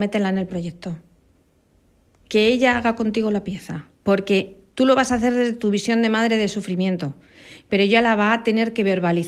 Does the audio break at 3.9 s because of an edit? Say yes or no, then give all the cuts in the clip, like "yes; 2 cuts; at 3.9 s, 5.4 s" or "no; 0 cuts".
yes; 1 cut; at 3.9 s